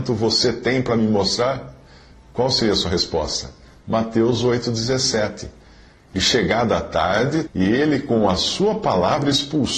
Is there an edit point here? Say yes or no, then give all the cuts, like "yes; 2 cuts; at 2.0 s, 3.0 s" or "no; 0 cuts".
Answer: yes; 2 cuts; at 6.0 s, 7.5 s